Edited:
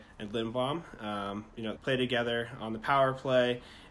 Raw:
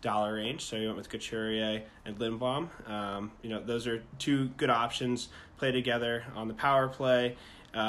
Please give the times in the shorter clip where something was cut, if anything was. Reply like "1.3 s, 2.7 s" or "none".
1.8 s